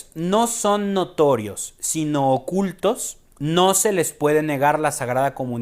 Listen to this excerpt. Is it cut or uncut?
uncut